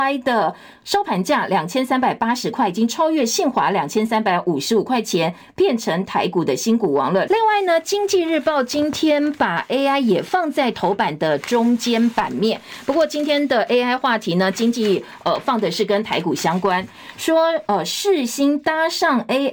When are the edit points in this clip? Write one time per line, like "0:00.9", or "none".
0:07.3